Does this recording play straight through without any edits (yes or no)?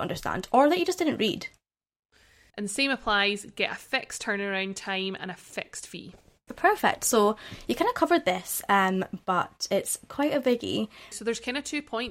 no